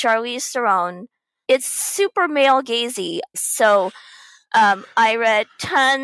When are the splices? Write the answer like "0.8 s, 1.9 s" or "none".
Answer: 1.4 s, 3.3 s